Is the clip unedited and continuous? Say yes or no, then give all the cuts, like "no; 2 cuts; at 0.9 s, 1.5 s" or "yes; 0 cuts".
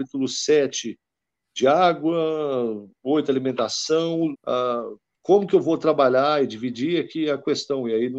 no; 1 cut; at 4.3 s